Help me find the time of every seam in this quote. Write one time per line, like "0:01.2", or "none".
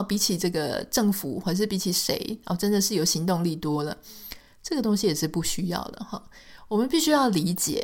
none